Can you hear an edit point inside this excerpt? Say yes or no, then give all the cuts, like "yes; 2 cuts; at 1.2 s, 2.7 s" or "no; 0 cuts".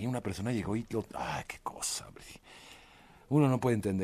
no; 0 cuts